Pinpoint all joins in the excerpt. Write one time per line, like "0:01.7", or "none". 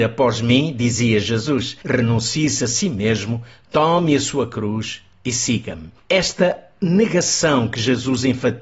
none